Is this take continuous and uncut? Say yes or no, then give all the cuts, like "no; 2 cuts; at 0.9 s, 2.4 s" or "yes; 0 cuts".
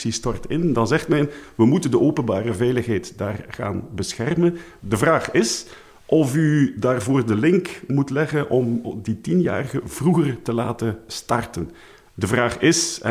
no; 2 cuts; at 4.8 s, 11.1 s